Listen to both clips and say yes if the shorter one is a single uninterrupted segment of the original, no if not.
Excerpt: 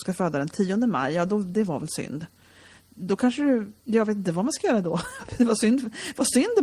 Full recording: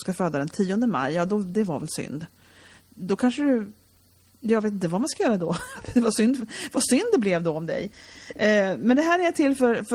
no